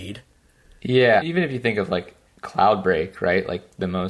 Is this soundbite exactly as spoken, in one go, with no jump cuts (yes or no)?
no